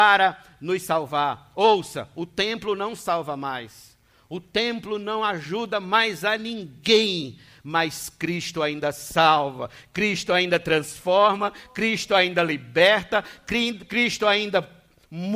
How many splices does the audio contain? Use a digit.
0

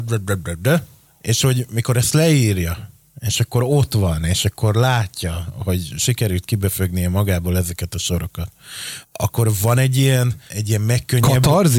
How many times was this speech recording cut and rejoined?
2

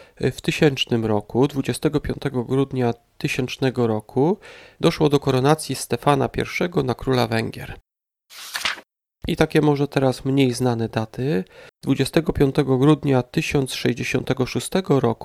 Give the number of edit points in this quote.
2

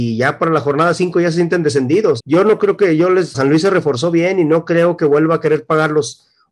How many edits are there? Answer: 2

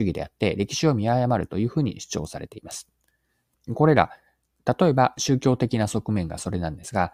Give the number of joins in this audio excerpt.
1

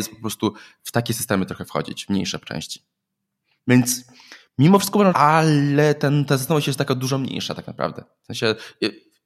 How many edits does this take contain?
1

